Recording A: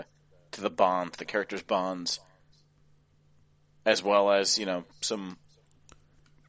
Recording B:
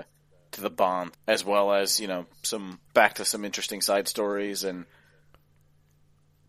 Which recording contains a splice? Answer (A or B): B